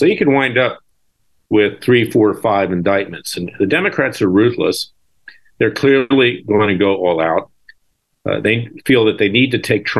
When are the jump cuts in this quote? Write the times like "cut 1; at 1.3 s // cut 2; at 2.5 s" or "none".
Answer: none